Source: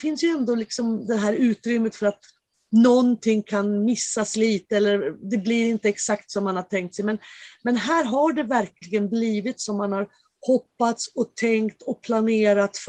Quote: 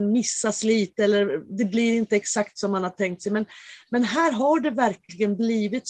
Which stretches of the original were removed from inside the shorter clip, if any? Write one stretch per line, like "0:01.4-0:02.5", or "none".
none